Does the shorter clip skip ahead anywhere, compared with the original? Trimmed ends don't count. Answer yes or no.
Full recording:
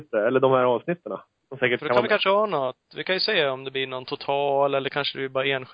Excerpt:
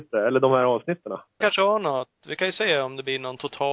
yes